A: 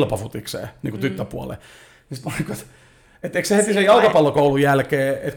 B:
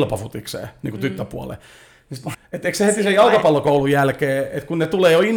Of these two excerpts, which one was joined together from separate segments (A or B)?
B